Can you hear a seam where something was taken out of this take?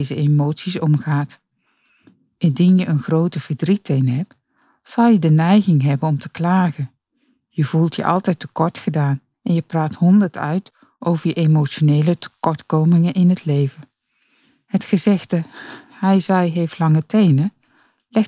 no; 0 cuts

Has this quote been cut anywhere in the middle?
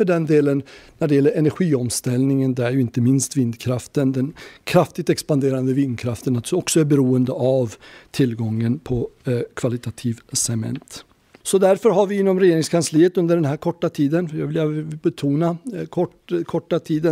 no; 0 cuts

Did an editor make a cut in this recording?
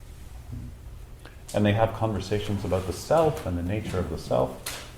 yes; 1 cut; at 1.5 s

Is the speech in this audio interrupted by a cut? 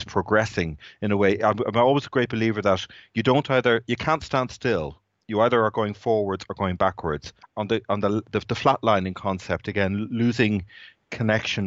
yes; 1 cut; at 7.5 s

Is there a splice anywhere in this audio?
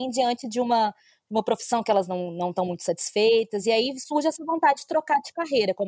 no; 0 cuts

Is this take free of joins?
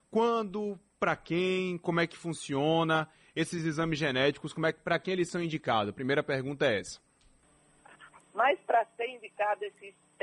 no; 1 cut; at 8.2 s

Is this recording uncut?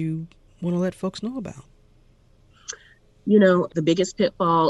no; 1 cut; at 3.7 s

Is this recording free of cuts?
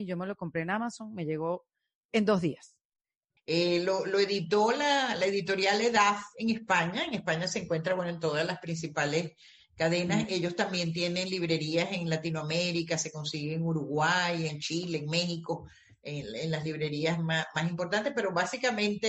no; 2 cuts; at 3.4 s, 14.5 s

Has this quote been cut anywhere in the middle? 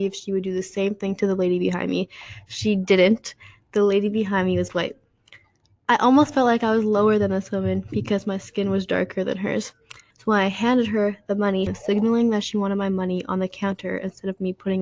yes; 2 cuts; at 10.1 s, 11.7 s

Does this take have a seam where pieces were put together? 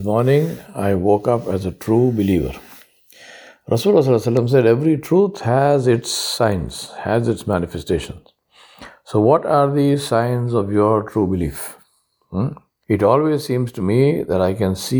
yes; 1 cut; at 12.8 s

